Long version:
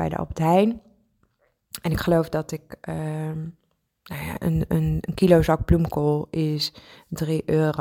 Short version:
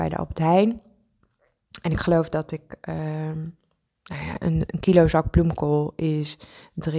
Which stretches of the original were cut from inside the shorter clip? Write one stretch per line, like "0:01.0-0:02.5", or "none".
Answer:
0:04.7-0:05.0